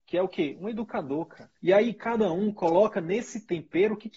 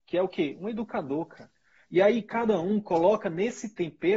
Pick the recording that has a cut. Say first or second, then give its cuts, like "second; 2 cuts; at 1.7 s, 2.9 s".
first; 1 cut; at 1.6 s